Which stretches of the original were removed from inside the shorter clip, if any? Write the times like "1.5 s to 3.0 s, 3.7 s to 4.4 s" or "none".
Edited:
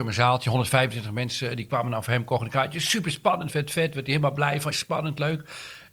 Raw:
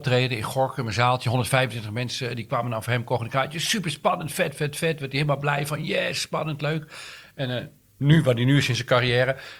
4.3 s to 4.5 s, 5.8 s to 6.1 s